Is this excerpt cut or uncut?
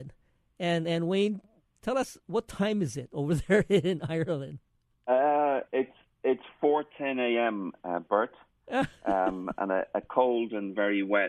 uncut